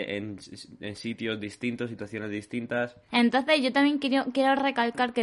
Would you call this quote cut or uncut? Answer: cut